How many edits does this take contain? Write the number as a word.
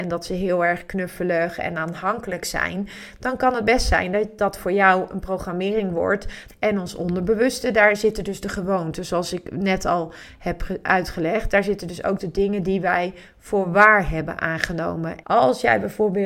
two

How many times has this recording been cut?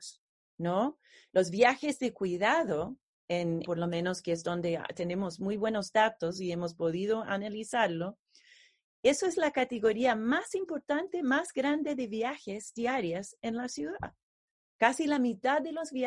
one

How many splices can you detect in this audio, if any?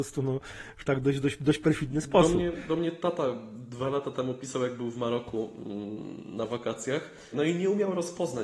one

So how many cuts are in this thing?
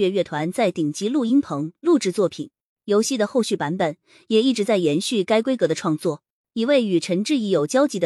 zero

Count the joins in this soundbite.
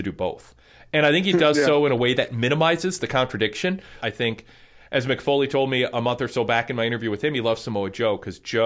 one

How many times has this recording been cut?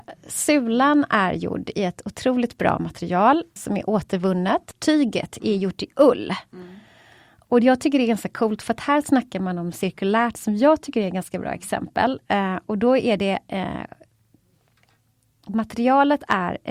one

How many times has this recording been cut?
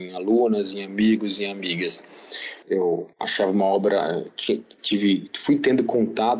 one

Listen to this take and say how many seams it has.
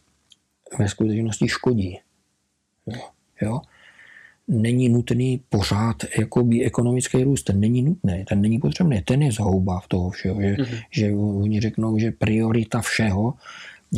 one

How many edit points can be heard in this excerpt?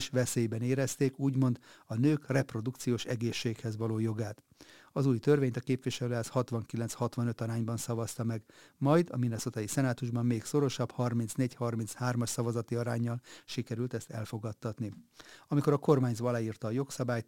zero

